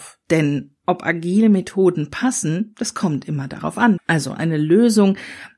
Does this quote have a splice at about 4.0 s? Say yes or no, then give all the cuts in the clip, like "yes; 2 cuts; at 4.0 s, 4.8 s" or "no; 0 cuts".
yes; 1 cut; at 4.0 s